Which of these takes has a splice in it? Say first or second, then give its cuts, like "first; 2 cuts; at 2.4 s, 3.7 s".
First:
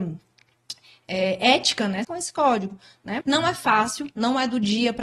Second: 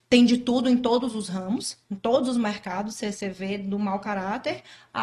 first; 2 cuts; at 2.0 s, 3.2 s